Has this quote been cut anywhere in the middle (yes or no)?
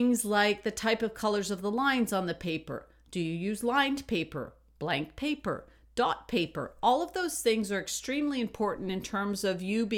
no